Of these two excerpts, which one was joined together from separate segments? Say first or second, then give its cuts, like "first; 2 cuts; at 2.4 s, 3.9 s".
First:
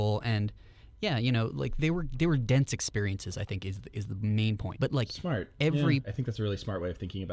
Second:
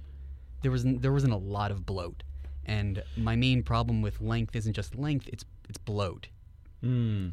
first; 2 cuts; at 4.7 s, 6.0 s